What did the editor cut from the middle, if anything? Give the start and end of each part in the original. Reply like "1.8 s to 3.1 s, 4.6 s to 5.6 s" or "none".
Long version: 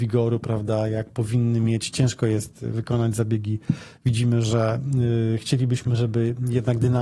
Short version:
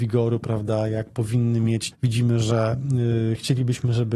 1.9 s to 3.9 s